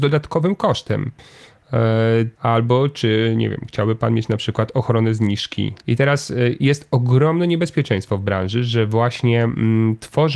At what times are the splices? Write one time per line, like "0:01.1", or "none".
0:02.3
0:05.8